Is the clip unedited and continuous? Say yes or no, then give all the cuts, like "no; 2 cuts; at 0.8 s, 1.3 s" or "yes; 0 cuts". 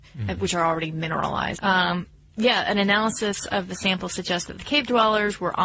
no; 1 cut; at 1.5 s